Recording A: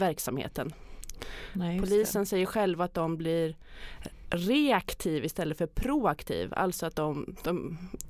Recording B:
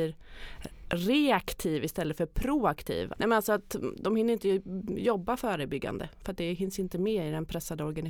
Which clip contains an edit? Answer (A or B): B